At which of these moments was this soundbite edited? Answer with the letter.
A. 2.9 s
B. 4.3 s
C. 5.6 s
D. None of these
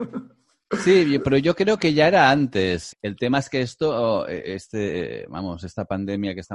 A